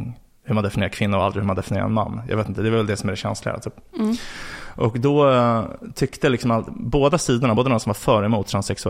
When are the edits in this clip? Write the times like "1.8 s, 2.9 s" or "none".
none